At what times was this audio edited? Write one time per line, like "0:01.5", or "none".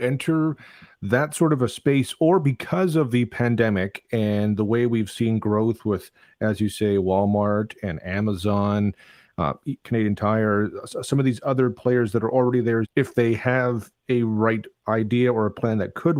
0:12.8